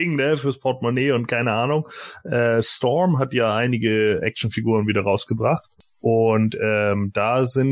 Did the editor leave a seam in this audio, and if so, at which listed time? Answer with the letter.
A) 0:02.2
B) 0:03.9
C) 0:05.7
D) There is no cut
D